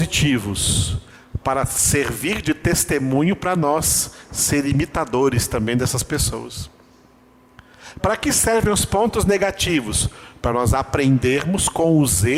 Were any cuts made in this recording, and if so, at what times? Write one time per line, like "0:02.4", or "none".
none